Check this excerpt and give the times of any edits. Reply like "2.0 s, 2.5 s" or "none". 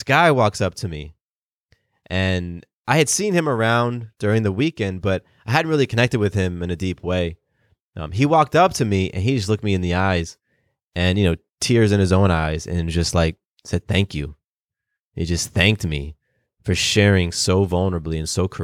none